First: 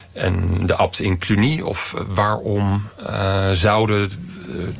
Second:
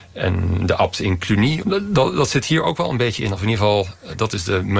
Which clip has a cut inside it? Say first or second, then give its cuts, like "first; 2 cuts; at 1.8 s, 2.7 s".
second; 1 cut; at 1.6 s